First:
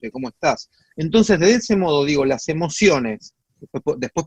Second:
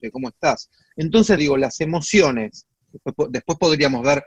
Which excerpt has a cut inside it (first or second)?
second